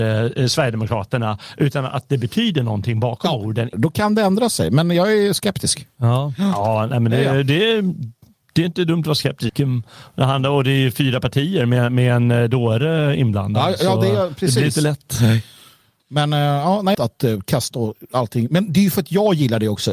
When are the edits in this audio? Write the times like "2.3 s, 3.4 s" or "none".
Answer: 3.7 s, 9.5 s, 16.9 s